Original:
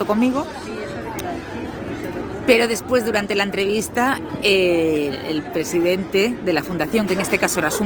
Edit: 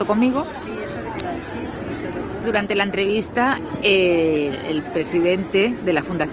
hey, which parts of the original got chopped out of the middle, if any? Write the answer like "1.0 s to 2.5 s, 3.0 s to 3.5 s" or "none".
2.4 s to 3.0 s